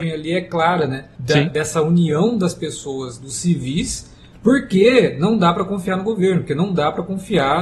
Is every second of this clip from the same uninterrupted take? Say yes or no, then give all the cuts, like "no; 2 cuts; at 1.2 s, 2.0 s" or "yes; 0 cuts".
yes; 0 cuts